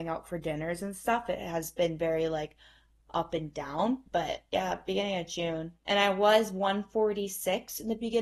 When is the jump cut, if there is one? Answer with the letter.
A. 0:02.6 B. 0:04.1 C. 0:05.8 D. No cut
B